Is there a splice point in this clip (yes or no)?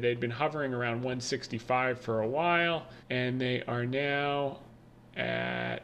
yes